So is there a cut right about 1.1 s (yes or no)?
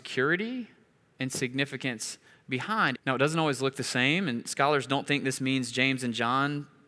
no